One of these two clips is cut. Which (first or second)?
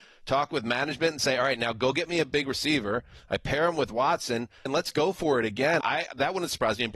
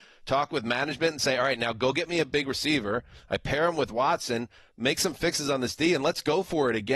first